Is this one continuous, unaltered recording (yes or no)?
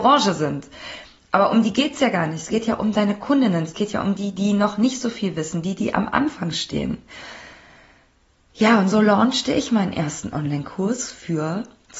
yes